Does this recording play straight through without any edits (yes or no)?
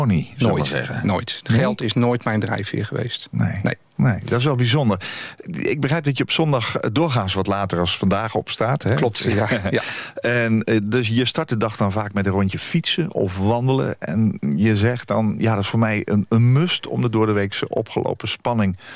yes